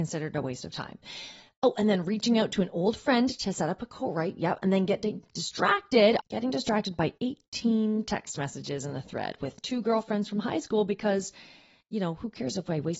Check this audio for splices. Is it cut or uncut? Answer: cut